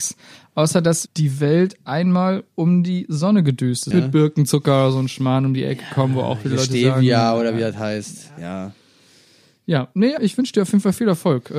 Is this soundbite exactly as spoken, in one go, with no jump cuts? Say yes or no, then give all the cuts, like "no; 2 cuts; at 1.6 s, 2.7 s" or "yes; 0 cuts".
no; 3 cuts; at 1.1 s, 3.9 s, 10.2 s